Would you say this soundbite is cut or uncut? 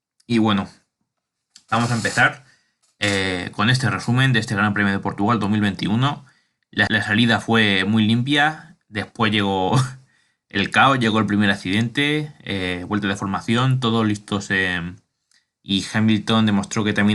cut